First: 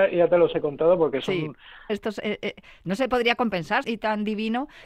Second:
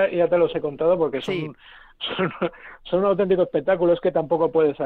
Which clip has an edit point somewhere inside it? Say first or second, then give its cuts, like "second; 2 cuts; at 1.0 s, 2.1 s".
first; 2 cuts; at 1.9 s, 3.8 s